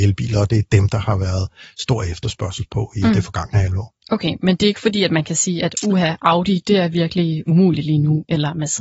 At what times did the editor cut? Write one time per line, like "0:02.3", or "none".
none